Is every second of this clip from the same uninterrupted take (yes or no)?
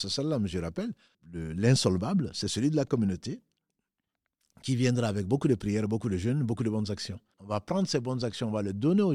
no